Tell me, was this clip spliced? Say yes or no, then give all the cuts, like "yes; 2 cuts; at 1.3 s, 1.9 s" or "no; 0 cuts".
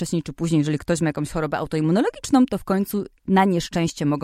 yes; 1 cut; at 3.2 s